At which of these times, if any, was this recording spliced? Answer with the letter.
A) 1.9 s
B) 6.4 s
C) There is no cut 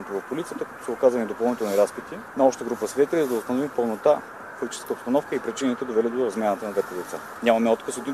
C